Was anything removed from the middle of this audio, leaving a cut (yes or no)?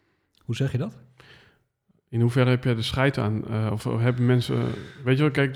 no